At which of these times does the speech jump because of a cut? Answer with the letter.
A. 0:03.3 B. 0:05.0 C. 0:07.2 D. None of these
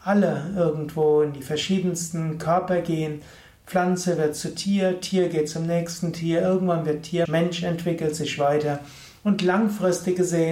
C